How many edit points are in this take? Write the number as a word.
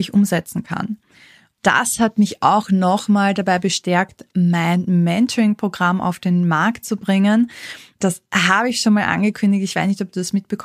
zero